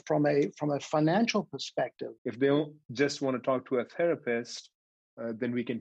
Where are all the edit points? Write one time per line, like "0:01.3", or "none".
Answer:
0:02.2